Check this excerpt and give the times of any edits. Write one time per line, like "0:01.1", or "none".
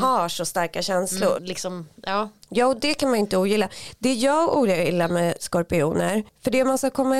0:01.3